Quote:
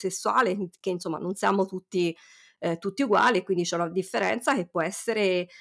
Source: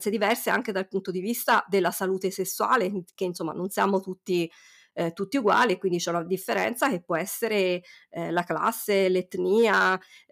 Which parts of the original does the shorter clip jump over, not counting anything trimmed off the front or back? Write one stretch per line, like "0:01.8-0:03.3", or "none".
none